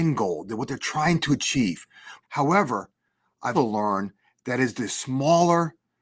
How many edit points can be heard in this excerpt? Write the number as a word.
two